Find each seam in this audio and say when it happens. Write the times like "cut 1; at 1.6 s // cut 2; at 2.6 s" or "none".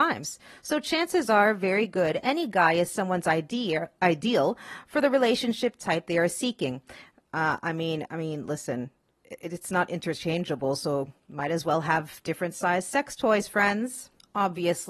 cut 1; at 8.1 s

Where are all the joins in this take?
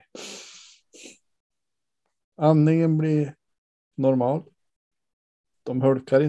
none

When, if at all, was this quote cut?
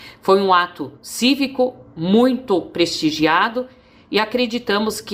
none

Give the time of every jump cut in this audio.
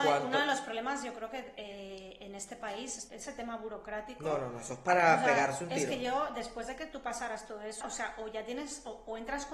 cut 1; at 3.1 s // cut 2; at 7.8 s

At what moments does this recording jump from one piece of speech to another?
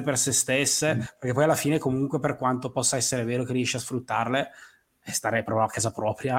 none

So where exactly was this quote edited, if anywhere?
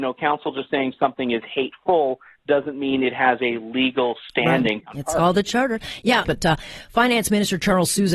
cut 1; at 4.8 s // cut 2; at 6.2 s

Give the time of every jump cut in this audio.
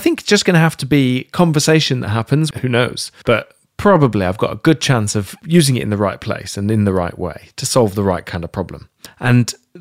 cut 1; at 2.5 s

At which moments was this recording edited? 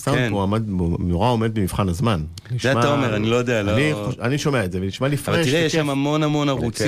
none

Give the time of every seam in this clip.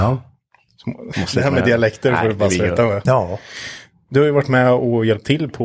cut 1; at 1.1 s // cut 2; at 3.1 s

